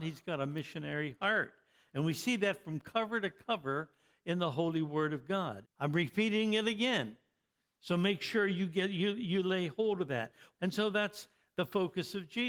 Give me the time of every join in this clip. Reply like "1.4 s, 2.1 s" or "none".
5.6 s, 10.5 s